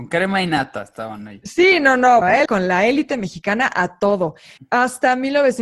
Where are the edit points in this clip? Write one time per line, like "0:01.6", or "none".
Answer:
0:02.2
0:04.6